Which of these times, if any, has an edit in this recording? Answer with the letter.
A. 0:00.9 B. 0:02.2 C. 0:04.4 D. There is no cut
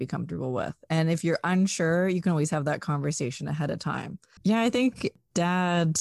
C